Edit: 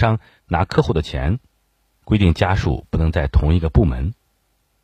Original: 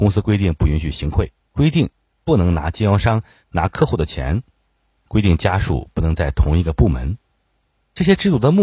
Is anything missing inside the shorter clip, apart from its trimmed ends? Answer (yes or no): no